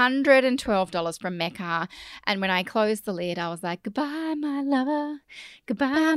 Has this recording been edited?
no; 0 cuts

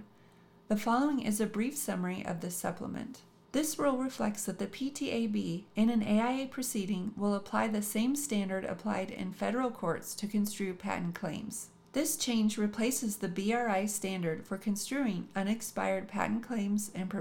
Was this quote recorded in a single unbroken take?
no; 1 cut; at 3.4 s

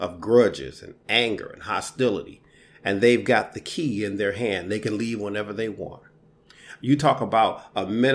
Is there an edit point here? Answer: no; 0 cuts

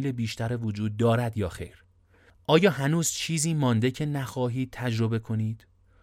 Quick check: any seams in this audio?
no; 0 cuts

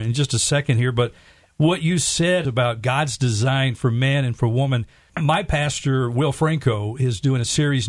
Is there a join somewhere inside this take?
no; 0 cuts

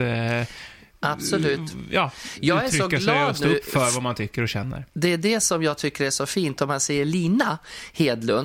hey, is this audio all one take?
yes; 0 cuts

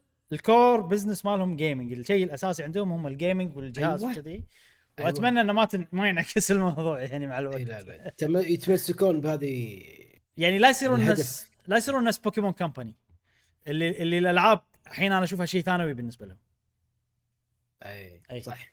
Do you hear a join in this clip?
no; 0 cuts

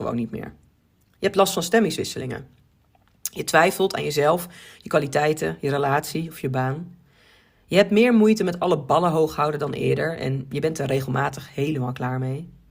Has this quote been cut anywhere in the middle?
no; 0 cuts

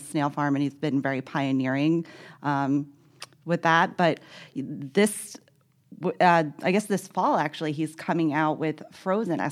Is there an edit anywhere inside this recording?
no; 0 cuts

